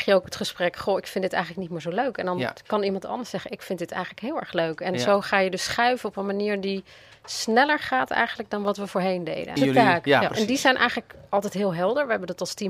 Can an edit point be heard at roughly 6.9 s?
no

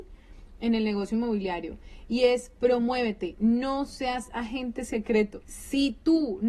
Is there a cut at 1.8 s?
no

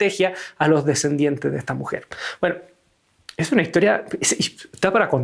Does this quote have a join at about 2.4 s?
no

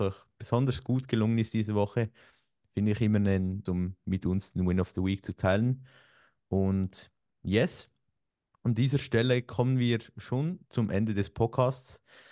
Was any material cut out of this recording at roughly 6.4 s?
no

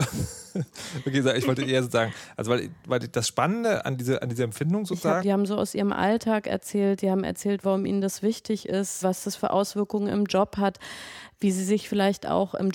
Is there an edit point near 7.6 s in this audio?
yes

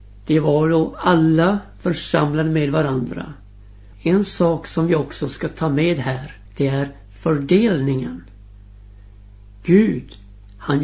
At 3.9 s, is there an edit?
yes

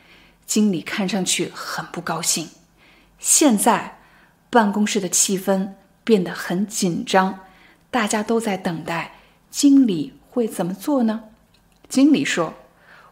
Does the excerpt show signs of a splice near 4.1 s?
no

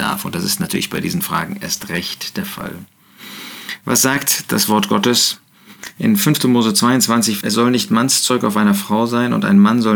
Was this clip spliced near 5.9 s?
no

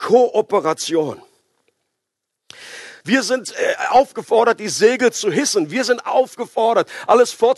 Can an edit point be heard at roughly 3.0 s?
yes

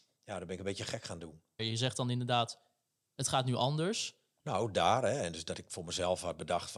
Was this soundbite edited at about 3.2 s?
no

